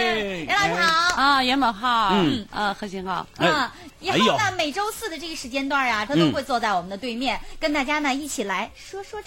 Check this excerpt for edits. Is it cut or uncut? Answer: cut